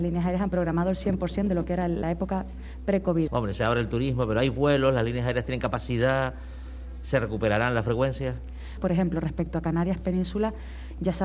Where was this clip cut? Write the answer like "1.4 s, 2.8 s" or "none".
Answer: 3.3 s, 8.8 s